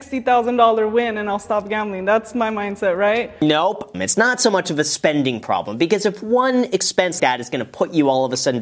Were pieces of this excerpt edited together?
yes; 2 cuts; at 3.9 s, 7.2 s

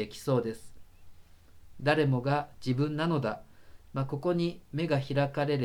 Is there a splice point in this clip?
yes; 1 cut; at 1.7 s

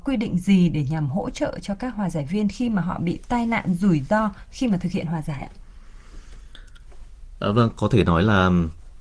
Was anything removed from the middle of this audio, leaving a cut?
no; 0 cuts

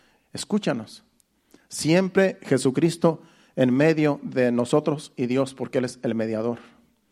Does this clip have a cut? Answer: no; 0 cuts

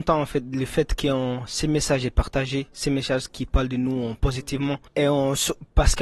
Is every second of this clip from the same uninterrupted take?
no; 1 cut; at 4.9 s

